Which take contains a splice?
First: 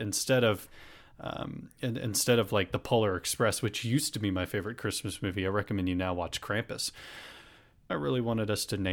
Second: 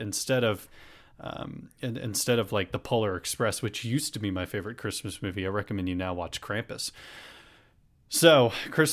first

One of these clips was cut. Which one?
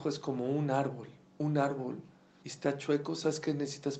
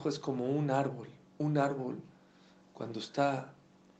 first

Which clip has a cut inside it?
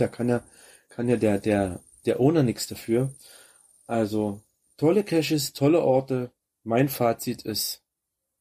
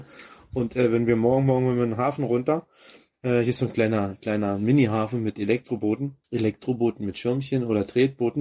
second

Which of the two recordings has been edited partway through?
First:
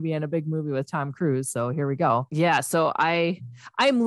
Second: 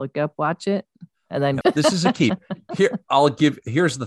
second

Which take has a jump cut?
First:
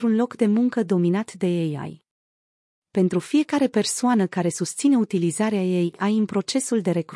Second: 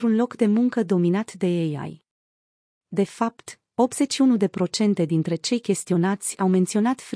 first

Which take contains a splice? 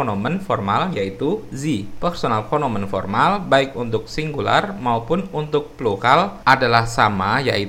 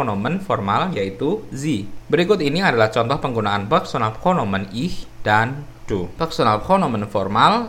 second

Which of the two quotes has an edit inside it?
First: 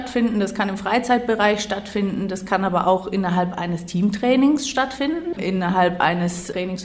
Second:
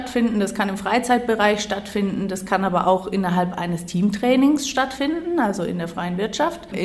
first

